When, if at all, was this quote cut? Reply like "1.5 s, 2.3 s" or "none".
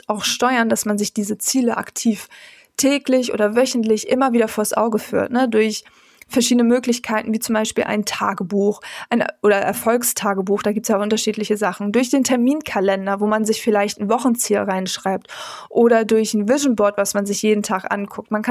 none